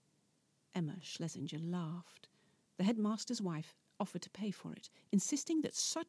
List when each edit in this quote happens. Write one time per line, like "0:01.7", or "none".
0:02.7